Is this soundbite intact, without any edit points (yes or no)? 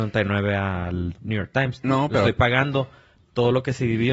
yes